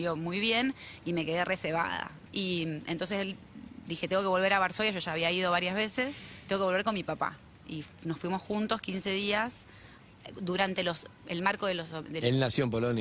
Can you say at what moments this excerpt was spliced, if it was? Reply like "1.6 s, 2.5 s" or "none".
2.3 s